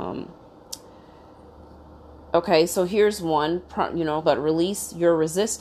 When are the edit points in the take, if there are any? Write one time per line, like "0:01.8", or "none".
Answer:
0:04.2